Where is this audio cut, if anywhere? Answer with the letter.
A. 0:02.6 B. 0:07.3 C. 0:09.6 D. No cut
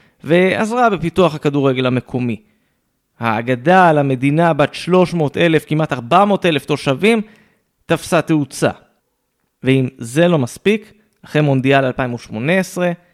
C